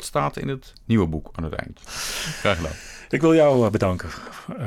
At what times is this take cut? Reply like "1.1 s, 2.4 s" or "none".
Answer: 1.9 s